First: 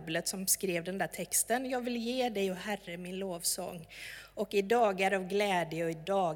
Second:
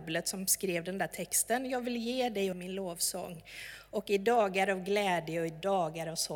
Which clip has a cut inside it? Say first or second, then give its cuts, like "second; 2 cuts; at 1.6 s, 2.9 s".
second; 1 cut; at 2.5 s